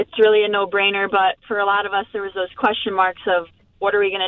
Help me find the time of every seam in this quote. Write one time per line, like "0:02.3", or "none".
none